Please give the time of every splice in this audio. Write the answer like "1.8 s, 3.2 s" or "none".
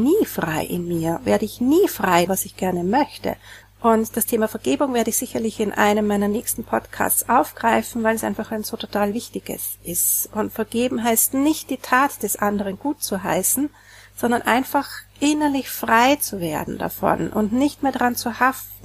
2.3 s, 3.6 s